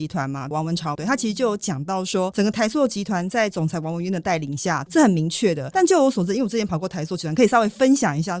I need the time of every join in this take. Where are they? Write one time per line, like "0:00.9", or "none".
0:00.9
0:04.8

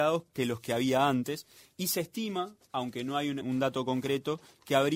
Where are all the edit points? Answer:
0:03.4

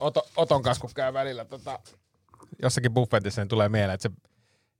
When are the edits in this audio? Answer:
none

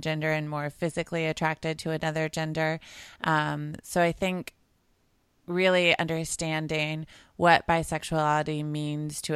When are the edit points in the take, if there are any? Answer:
none

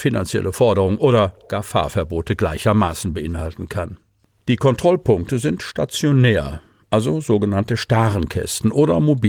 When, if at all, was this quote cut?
none

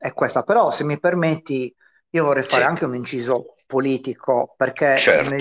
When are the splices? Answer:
none

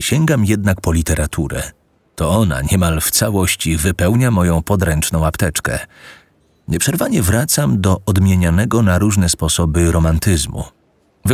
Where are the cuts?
none

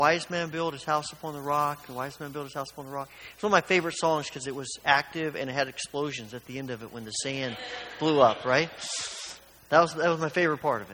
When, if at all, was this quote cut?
none

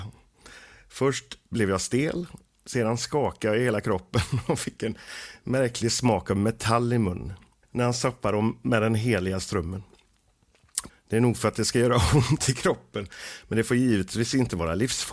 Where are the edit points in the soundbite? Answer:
0:07.6
0:10.9

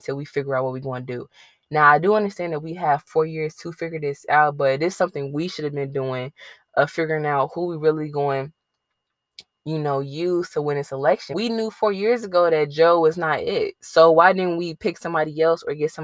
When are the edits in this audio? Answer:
0:11.3

